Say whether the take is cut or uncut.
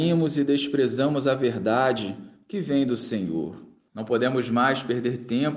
cut